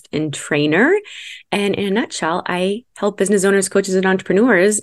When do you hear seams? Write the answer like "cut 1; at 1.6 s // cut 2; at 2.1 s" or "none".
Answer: none